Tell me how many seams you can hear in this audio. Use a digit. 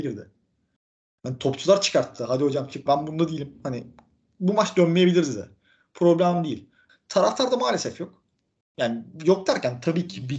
2